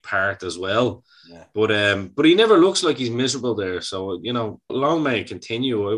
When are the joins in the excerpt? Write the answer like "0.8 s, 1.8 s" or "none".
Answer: 4.7 s